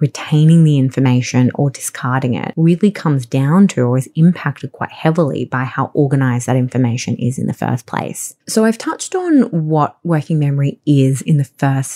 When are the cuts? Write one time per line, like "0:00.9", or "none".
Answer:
0:08.4